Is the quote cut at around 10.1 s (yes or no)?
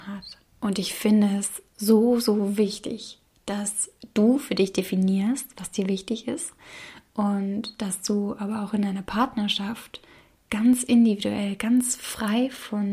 no